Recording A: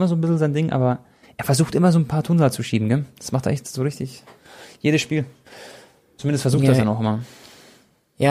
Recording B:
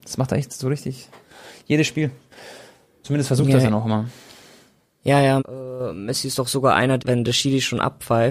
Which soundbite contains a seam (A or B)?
B